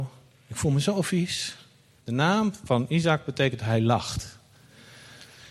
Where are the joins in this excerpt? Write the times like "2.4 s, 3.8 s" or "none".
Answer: 2.0 s